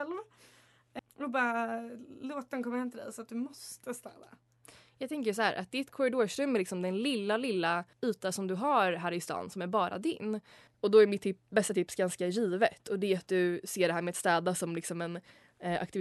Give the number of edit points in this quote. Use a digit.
3